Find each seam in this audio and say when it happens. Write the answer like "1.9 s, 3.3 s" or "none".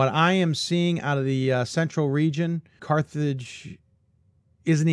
2.8 s